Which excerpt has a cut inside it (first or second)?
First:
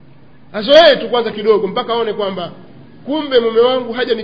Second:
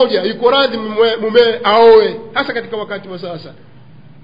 first